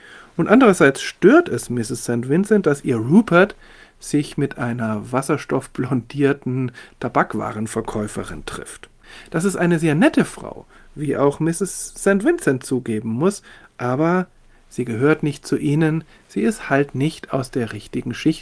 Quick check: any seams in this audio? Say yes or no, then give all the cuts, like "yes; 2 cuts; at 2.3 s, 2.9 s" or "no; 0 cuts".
no; 0 cuts